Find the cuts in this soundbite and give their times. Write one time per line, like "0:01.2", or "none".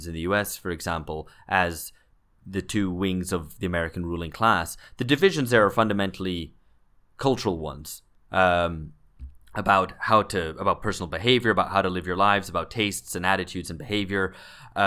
none